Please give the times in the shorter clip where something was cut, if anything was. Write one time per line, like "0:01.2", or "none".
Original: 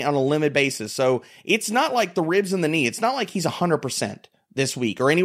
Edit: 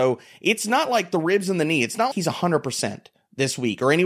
0:02.1